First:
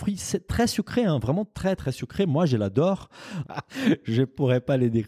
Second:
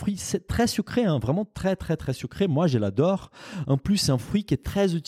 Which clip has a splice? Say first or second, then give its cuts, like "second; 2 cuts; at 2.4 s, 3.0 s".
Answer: first; 2 cuts; at 1.8 s, 3.4 s